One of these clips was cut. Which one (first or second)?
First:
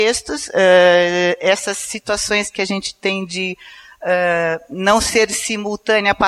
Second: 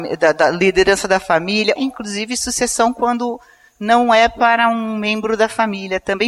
second